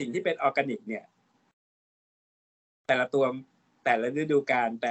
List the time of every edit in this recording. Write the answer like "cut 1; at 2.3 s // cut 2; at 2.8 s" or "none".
none